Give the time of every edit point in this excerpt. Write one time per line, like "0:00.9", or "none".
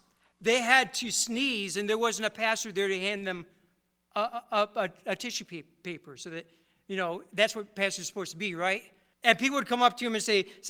0:09.1